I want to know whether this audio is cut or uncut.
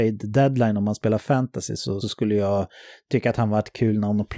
cut